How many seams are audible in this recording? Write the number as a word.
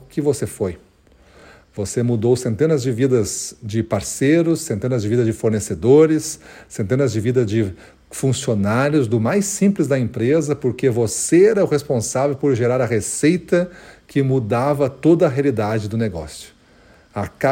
zero